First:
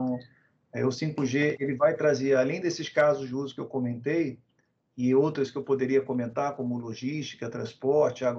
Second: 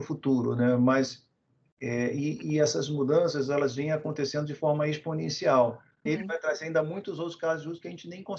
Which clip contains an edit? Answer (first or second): second